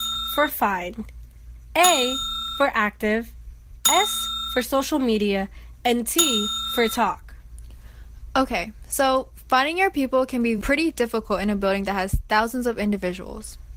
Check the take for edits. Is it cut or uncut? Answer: uncut